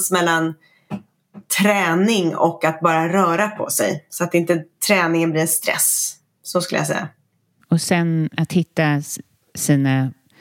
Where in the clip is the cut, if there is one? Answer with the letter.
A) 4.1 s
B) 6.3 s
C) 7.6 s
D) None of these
C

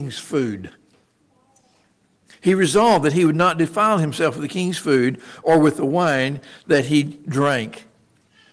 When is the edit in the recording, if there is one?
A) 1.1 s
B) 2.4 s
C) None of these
C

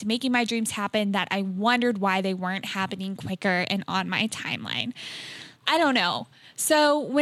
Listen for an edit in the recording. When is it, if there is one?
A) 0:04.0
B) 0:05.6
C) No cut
B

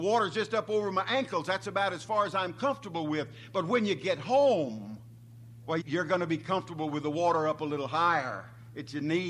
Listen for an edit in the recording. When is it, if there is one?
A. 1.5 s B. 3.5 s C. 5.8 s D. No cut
C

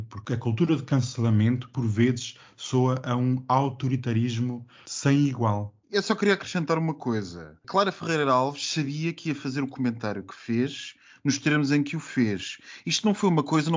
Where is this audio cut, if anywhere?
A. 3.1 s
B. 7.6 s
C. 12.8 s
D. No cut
D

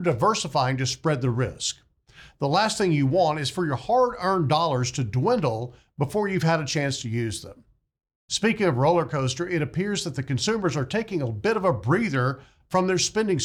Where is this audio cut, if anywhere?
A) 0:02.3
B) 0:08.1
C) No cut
C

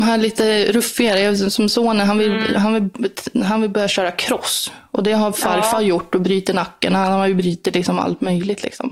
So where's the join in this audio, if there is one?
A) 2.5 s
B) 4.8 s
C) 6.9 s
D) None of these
D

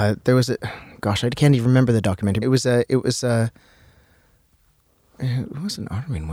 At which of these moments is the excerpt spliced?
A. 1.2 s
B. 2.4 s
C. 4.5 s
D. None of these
B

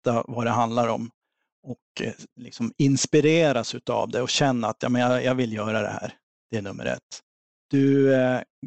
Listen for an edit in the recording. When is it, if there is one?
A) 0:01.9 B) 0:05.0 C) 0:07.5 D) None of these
C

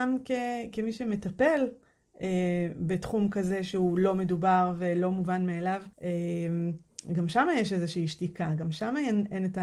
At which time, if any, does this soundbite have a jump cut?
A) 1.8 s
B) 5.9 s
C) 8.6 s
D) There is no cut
B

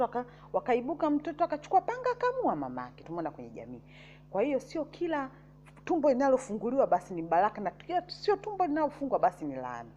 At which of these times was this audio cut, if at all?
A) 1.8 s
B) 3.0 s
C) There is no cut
B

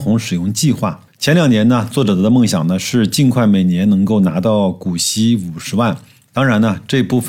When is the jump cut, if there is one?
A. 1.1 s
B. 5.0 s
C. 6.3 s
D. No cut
C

